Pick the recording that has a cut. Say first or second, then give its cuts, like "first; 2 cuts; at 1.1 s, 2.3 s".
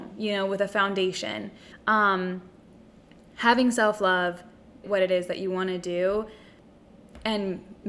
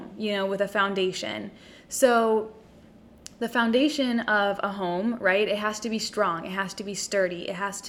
first; 2 cuts; at 1.7 s, 4.8 s